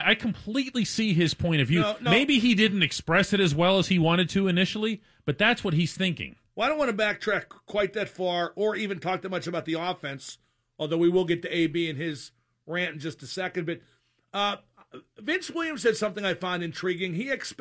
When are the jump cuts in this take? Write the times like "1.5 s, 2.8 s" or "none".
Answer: none